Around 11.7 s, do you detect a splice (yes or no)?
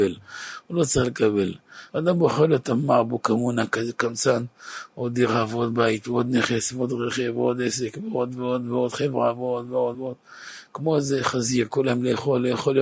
no